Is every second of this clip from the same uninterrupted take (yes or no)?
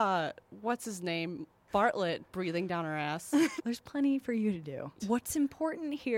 no